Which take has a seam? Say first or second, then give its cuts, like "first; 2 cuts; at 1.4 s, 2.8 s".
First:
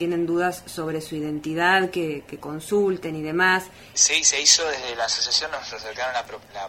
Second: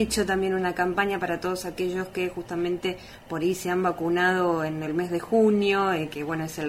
first; 1 cut; at 3.9 s